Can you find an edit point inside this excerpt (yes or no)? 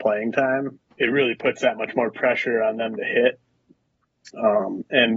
yes